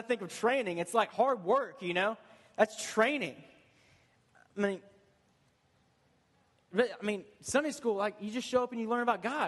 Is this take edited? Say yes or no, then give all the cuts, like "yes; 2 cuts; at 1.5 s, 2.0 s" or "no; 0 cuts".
no; 0 cuts